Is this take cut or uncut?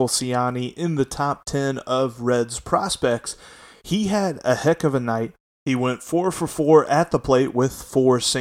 uncut